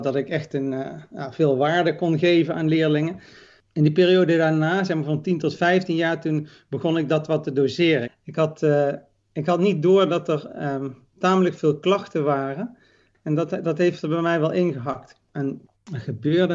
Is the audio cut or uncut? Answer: cut